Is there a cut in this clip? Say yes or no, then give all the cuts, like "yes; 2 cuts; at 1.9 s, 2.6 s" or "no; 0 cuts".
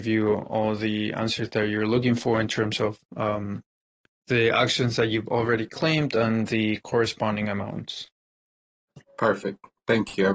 no; 0 cuts